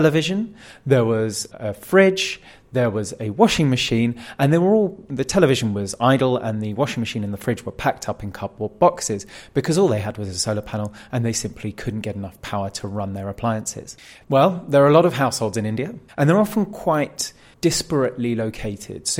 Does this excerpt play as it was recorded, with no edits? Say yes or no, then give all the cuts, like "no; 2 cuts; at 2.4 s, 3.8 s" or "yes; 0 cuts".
no; 2 cuts; at 14.2 s, 16.1 s